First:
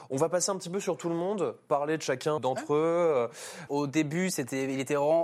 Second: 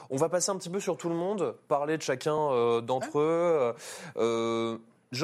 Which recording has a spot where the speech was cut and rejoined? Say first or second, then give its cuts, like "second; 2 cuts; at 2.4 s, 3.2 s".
first; 2 cuts; at 2.4 s, 3.7 s